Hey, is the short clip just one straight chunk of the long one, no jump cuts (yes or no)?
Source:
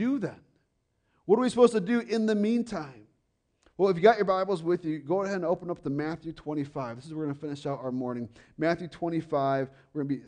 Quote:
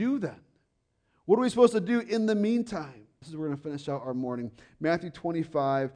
no